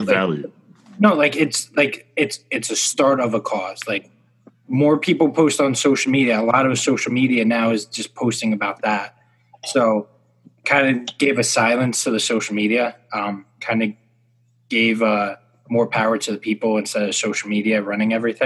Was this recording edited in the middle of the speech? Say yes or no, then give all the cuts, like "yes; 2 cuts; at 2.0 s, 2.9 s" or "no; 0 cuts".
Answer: no; 0 cuts